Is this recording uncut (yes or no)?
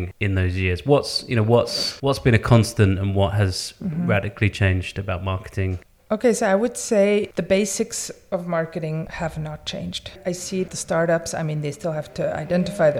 yes